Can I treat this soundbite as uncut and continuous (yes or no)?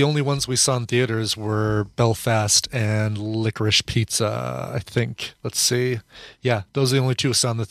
yes